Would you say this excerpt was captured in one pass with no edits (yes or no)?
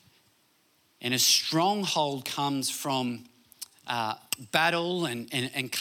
yes